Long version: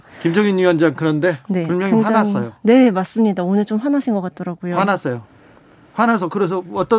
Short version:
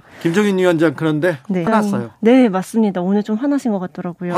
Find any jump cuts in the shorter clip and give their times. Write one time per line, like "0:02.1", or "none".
0:01.7